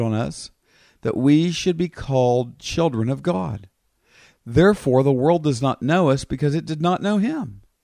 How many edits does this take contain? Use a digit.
0